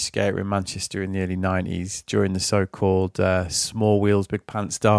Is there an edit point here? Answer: no; 0 cuts

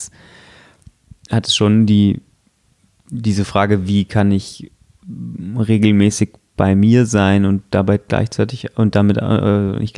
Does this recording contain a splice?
no; 0 cuts

